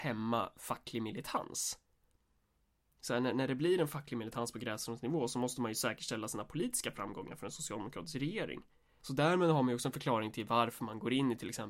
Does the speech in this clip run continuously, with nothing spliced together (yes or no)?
no